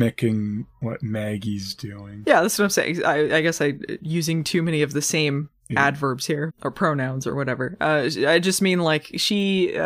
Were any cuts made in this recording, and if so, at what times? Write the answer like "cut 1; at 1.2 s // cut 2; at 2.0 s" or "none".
cut 1; at 6.5 s